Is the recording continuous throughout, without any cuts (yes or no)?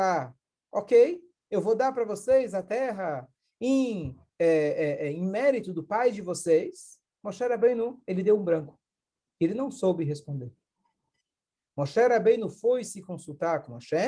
yes